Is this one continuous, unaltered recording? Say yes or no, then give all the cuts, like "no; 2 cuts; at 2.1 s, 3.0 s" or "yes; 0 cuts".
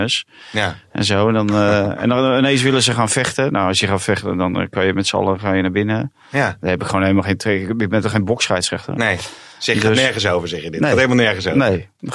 yes; 0 cuts